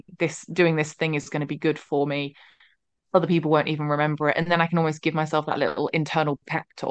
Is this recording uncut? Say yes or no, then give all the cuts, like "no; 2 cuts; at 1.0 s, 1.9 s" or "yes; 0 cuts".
yes; 0 cuts